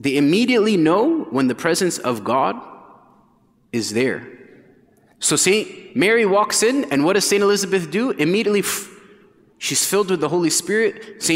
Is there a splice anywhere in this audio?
no; 0 cuts

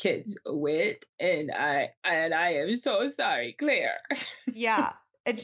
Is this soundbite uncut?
yes; 0 cuts

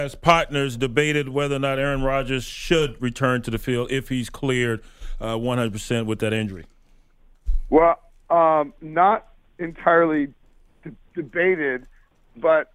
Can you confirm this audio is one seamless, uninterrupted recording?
yes; 0 cuts

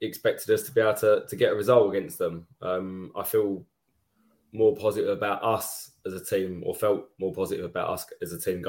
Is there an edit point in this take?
no; 0 cuts

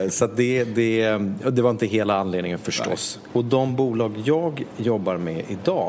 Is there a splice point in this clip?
yes; 2 cuts; at 3.3 s, 4.7 s

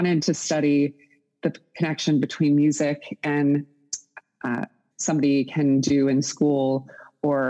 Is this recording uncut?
no; 1 cut; at 4.9 s

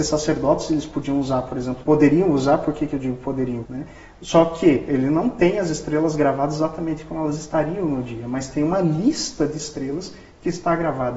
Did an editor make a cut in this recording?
yes; 2 cuts; at 1.8 s, 3.6 s

